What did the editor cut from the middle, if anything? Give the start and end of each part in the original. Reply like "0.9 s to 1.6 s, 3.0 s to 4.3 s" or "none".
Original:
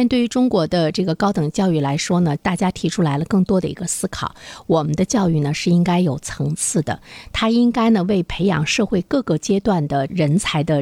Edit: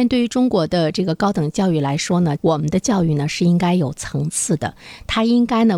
2.4 s to 4.6 s